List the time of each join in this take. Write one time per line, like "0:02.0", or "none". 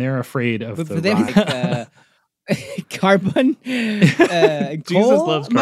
0:01.3